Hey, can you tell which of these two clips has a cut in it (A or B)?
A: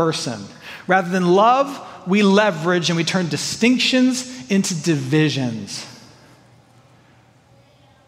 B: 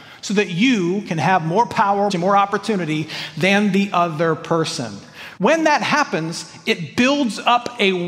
B